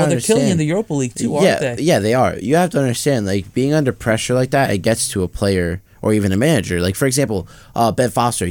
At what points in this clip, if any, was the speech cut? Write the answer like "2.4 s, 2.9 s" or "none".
none